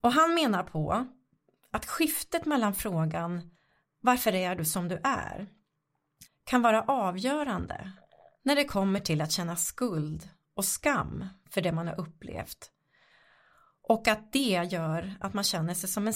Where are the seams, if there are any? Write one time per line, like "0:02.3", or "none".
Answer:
0:06.3